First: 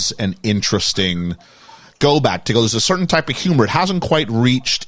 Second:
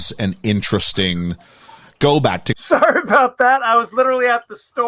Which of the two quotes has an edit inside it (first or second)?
second